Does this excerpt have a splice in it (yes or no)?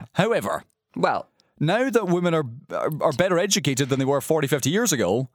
no